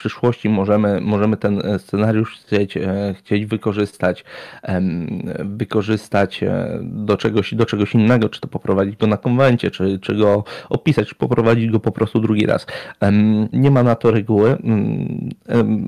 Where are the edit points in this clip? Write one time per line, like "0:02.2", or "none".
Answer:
0:13.5

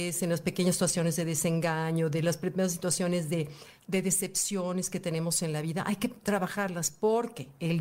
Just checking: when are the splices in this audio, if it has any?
none

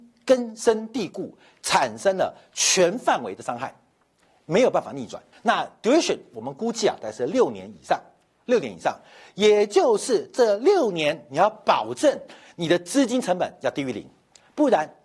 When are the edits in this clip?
0:05.3

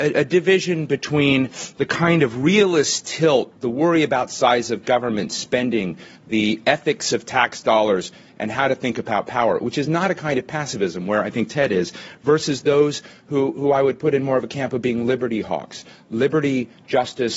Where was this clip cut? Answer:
none

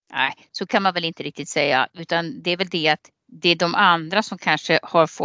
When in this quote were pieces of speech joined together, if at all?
none

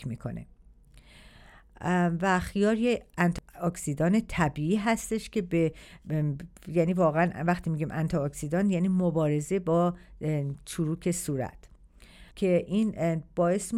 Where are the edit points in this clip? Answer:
0:12.3

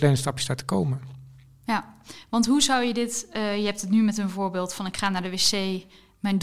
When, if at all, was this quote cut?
none

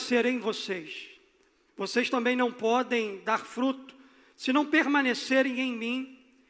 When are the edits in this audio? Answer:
0:01.7

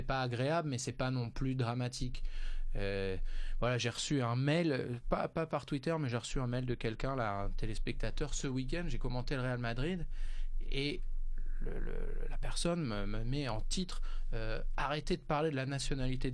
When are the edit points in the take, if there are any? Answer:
none

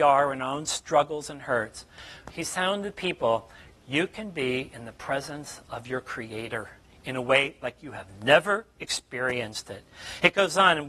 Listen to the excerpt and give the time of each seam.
none

